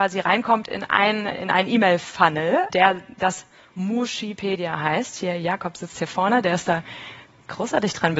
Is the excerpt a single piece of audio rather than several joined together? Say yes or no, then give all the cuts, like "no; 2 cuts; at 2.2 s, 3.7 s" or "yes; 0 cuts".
no; 2 cuts; at 1.3 s, 2.7 s